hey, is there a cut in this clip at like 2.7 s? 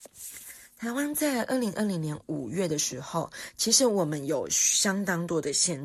no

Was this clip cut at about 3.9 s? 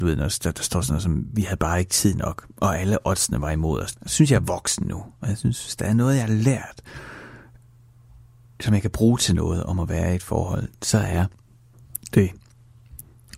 yes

